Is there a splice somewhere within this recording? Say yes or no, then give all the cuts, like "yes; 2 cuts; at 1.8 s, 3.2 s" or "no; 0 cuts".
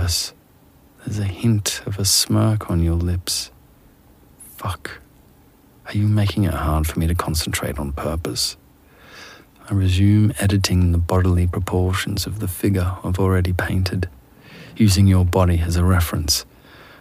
no; 0 cuts